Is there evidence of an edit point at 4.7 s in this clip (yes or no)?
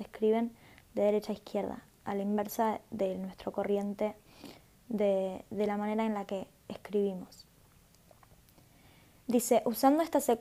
no